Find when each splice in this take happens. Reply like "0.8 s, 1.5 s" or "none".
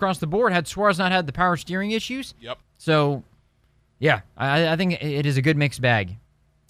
2.6 s